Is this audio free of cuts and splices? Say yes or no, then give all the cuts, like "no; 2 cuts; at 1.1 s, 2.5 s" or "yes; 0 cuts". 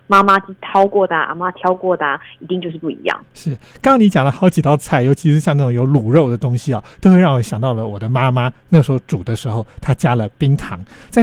yes; 0 cuts